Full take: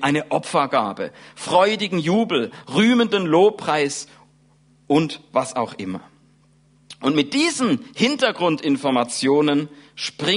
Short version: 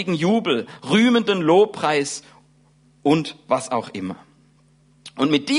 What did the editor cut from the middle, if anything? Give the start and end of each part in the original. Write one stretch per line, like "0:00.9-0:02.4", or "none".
none